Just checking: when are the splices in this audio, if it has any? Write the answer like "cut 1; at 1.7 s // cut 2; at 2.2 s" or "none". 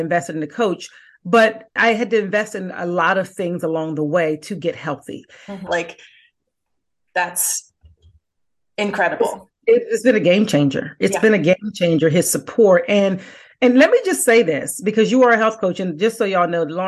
cut 1; at 1.8 s // cut 2; at 5.7 s